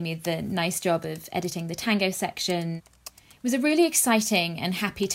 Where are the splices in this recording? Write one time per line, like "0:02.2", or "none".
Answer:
none